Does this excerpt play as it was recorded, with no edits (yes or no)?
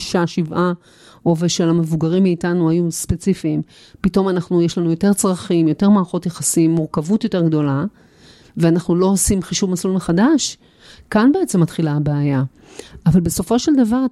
yes